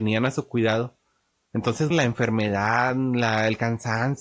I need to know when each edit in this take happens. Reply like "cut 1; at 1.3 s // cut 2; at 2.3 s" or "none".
cut 1; at 1.9 s